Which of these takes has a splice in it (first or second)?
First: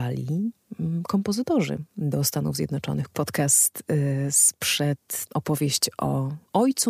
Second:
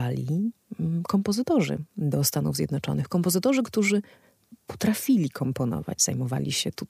first